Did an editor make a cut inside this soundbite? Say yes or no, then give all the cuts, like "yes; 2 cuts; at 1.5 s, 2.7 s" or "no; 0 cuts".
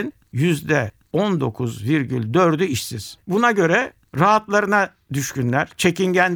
yes; 1 cut; at 3.2 s